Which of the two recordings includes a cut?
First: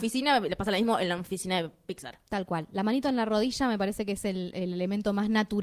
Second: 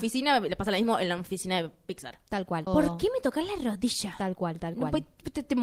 second; 1 cut; at 2.7 s

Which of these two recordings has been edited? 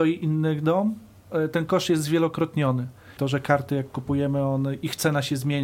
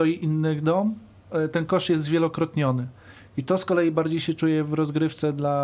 first; 1 cut; at 3.2 s

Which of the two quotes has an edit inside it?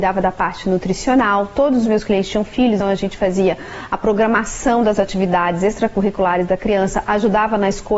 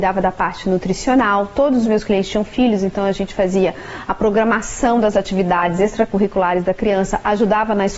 first; 1 cut; at 2.8 s

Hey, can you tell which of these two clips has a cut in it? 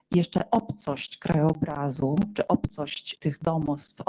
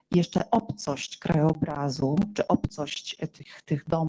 first; 1 cut; at 3.2 s

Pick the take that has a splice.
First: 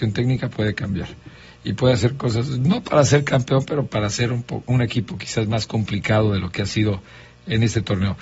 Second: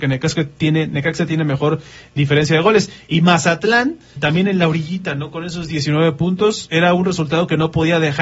second; 1 cut; at 4.2 s

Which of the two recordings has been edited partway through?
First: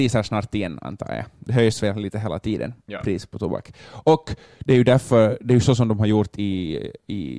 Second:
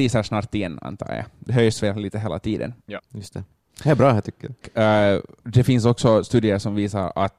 second; 2 cuts; at 3.0 s, 4.6 s

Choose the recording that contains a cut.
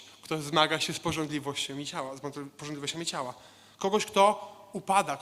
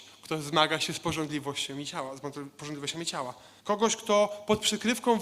second; 1 cut; at 3.6 s

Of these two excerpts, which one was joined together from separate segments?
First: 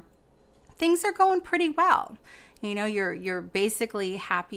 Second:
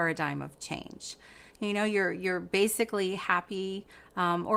second; 1 cut; at 1.5 s

